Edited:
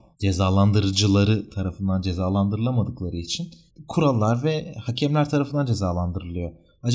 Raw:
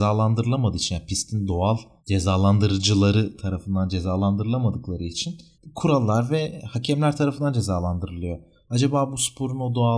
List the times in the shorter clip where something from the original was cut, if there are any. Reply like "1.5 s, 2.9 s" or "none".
none

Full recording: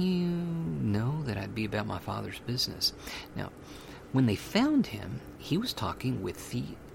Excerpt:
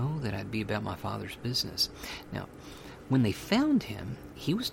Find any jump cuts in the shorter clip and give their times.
none

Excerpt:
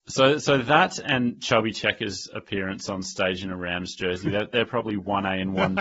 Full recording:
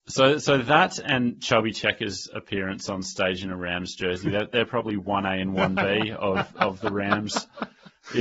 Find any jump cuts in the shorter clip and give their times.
none

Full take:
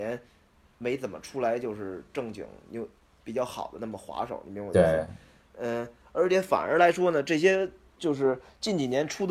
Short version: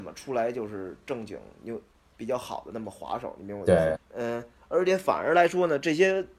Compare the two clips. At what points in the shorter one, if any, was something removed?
3.9 s

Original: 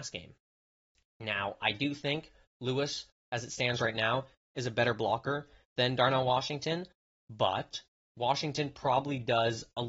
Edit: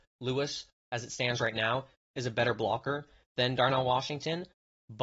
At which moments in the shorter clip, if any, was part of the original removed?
none

